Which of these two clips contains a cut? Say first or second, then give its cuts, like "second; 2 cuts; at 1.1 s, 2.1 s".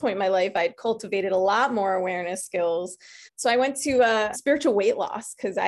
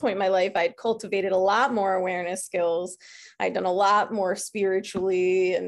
first; 2 cuts; at 3.3 s, 4.3 s